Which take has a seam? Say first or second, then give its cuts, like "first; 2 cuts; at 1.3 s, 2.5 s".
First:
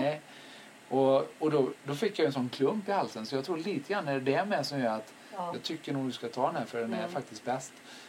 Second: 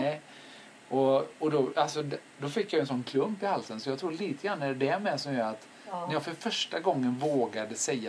first; 2 cuts; at 1.7 s, 5.5 s